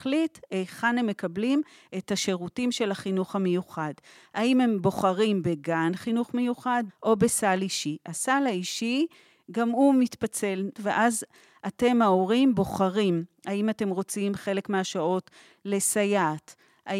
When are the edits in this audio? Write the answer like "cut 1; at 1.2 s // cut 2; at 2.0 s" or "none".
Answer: cut 1; at 6.9 s // cut 2; at 10.8 s